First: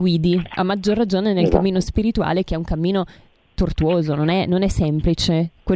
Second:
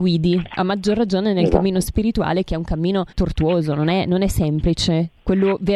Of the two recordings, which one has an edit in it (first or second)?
second